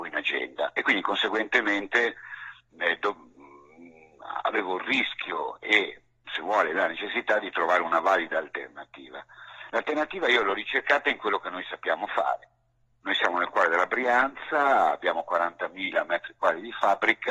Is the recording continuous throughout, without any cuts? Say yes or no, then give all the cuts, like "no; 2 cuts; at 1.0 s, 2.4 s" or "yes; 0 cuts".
yes; 0 cuts